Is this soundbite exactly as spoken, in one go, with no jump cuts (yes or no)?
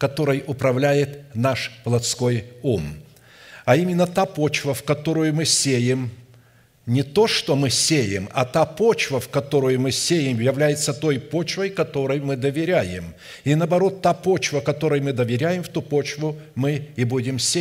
yes